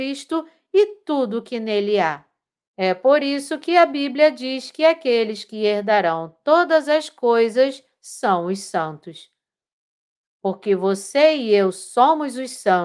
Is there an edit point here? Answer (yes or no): yes